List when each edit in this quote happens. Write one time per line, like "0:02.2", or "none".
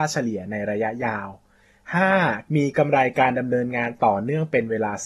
0:02.5